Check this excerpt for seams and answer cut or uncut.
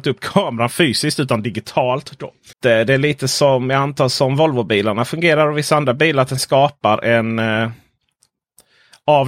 cut